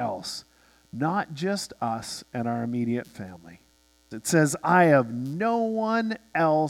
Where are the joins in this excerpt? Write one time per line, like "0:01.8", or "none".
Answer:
0:04.1